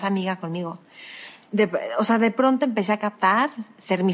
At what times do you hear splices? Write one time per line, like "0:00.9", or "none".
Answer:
0:01.5